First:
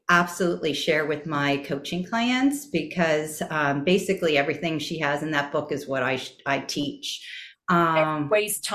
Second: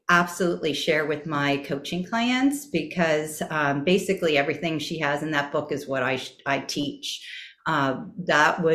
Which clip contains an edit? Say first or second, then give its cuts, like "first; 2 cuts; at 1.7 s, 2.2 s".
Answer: first; 1 cut; at 7.5 s